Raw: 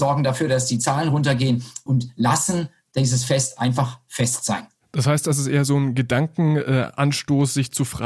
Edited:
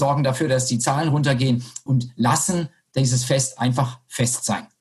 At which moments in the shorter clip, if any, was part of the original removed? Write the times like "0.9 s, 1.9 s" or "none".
none